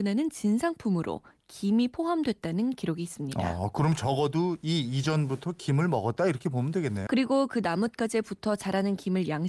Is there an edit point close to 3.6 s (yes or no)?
no